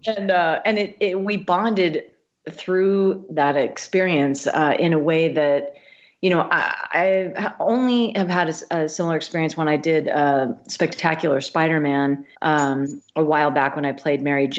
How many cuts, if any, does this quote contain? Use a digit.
1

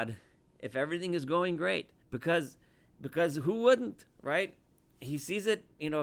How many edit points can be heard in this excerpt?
1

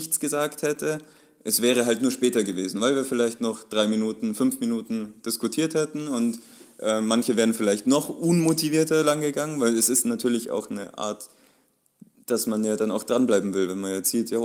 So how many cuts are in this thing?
0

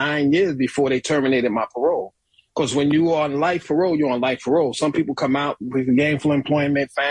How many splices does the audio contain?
0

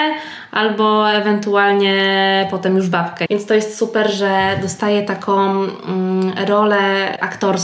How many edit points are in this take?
1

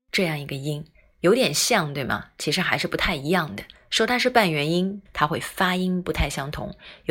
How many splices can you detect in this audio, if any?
1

